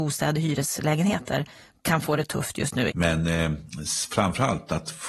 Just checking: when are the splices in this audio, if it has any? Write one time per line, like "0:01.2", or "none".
0:02.9